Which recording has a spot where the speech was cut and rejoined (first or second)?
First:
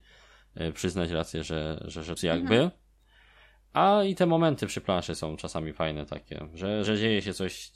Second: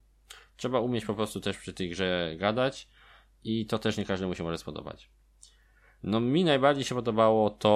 first